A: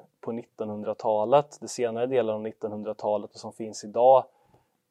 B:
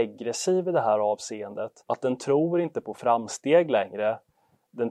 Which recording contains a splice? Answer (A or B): B